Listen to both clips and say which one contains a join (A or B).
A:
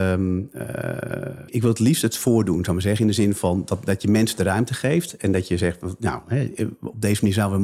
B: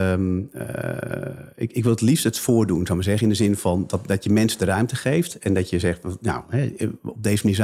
A